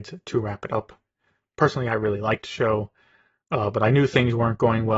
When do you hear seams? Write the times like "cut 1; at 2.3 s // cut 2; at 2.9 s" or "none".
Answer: none